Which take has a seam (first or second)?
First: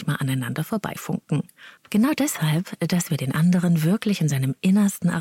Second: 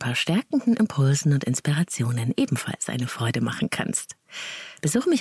first